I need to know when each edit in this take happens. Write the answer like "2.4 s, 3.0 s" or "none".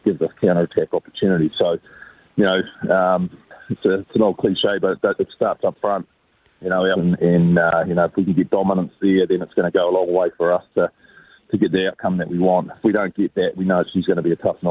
6.9 s